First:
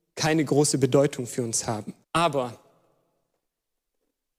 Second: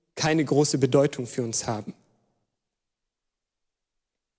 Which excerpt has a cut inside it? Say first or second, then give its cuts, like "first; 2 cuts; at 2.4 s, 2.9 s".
first; 1 cut; at 2.0 s